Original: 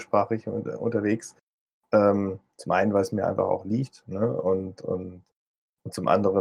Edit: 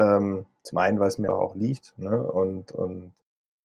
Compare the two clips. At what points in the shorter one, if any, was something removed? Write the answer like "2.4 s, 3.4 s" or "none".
1.3 s